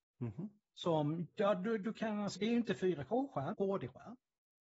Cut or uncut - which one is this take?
cut